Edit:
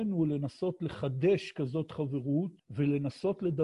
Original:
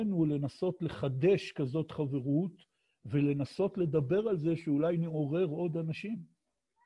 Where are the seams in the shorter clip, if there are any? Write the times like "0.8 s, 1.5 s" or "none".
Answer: 2.6 s

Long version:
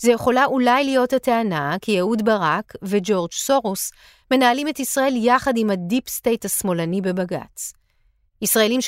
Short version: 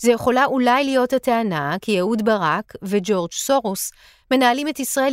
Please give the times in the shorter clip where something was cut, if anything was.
none

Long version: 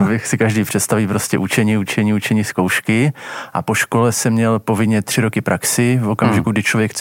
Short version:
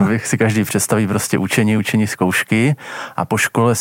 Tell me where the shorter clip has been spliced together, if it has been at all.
1.8 s

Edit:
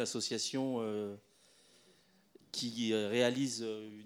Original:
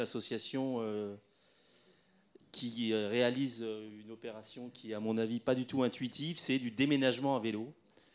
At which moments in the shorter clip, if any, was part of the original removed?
none

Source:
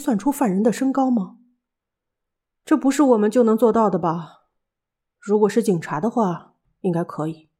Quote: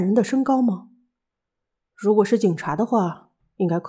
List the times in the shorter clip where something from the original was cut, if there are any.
1.8 s

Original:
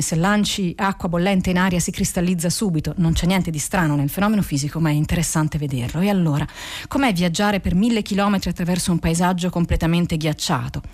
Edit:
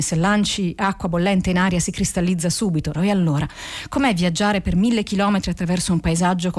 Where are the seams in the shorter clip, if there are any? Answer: 2.9 s

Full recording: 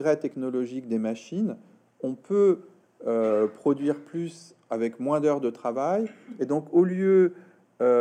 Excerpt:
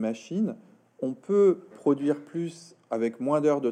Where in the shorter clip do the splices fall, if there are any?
1.7 s

